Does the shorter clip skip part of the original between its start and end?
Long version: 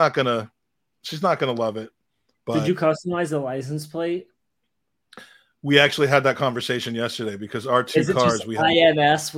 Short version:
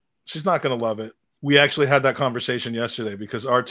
yes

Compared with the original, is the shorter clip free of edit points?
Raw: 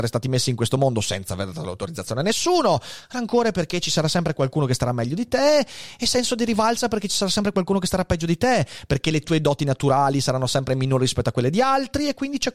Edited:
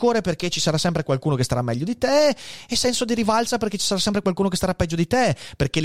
yes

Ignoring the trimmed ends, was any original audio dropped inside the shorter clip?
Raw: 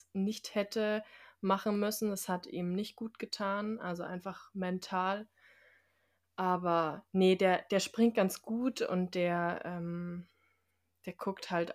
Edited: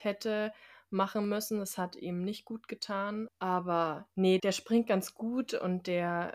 yes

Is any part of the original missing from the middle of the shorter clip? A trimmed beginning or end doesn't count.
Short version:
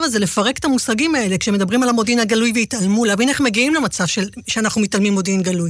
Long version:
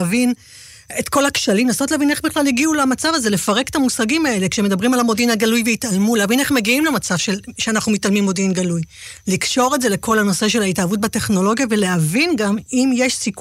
no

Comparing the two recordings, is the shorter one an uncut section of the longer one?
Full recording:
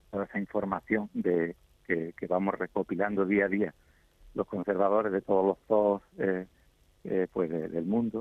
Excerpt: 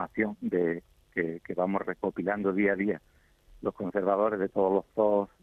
yes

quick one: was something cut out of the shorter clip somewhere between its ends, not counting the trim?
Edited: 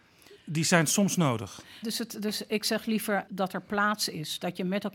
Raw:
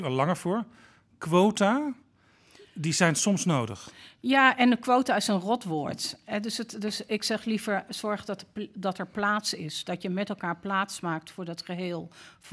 yes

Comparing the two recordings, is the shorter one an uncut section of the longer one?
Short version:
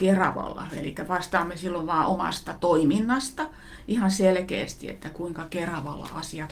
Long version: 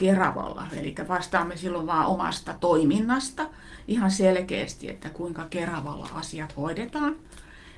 yes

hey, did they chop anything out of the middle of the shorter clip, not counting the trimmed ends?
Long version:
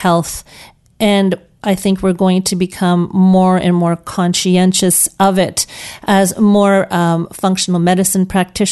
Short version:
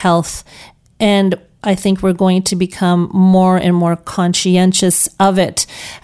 no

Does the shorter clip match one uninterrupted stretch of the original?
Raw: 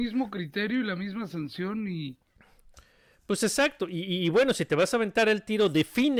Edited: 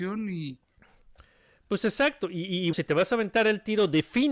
no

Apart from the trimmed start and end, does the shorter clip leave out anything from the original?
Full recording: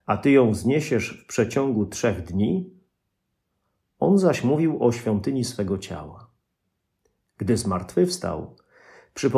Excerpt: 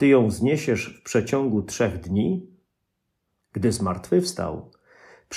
yes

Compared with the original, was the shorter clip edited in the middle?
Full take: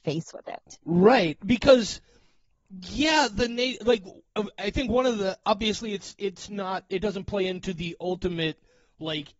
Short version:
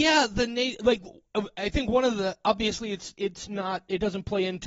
no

